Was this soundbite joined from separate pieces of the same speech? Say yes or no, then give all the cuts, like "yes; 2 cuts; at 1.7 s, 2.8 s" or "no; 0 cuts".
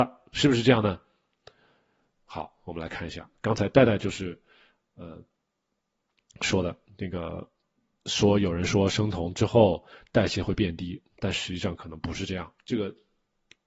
yes; 1 cut; at 12.6 s